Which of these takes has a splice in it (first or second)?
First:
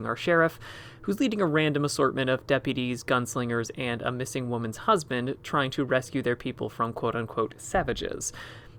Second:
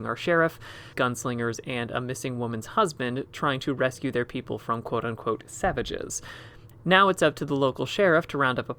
second